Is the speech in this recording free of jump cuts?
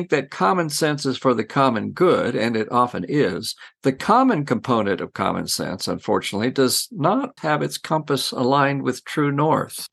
no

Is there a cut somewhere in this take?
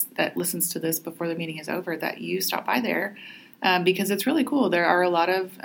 no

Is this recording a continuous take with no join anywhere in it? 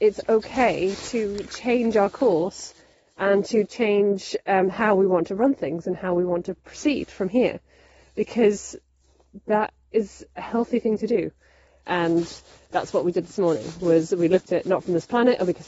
no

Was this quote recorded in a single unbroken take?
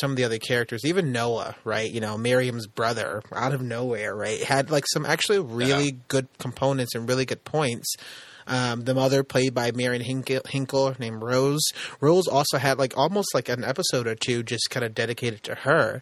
yes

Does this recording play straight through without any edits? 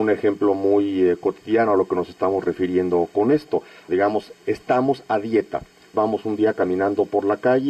no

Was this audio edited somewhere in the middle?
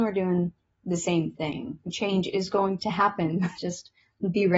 yes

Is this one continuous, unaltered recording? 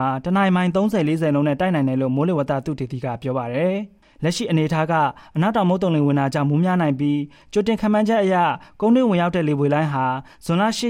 yes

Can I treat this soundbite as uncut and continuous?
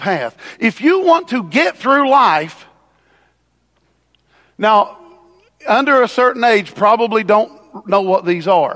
yes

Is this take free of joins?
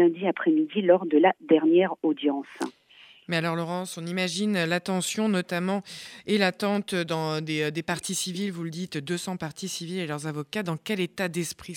yes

